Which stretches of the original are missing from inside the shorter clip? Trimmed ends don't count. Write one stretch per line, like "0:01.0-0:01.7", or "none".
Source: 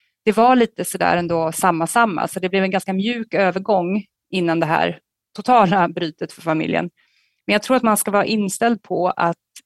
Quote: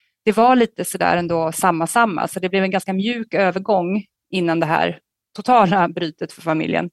none

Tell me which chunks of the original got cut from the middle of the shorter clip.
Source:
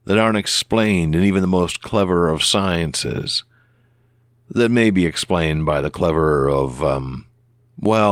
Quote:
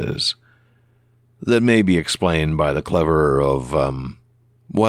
none

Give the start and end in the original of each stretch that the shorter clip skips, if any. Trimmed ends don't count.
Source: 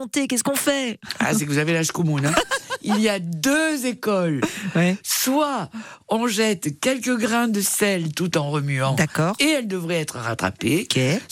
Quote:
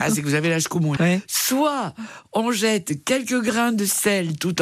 0:02.2-0:04.7

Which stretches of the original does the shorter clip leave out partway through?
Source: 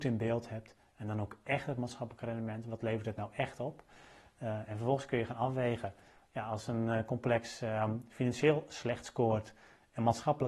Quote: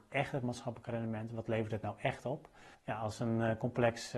0:04.1-0:06.2

